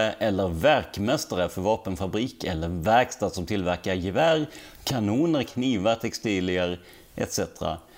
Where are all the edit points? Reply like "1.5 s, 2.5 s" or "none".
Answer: 5.4 s